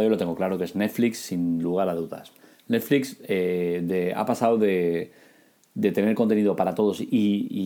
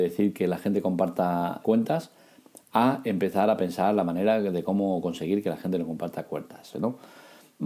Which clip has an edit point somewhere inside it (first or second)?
second